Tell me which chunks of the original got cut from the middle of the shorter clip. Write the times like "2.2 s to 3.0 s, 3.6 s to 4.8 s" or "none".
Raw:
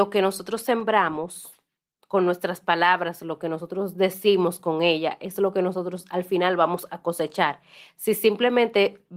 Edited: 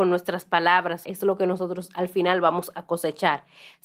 3.2 s to 5.2 s